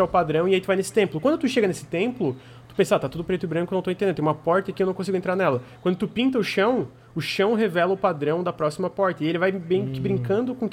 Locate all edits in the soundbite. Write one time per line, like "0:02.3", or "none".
none